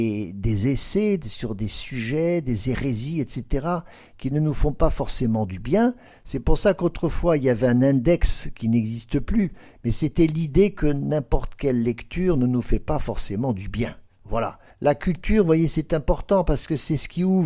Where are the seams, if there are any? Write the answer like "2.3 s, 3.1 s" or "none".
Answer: 14.7 s